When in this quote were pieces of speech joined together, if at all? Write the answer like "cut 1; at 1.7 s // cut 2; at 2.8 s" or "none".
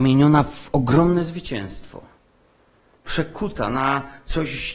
none